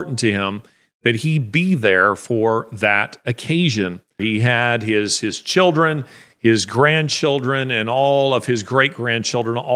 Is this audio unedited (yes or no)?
no